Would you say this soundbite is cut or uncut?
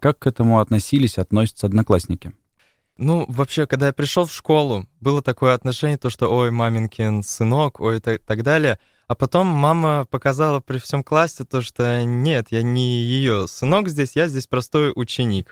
uncut